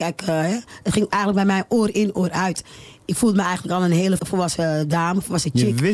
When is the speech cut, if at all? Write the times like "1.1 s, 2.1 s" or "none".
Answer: 4.2 s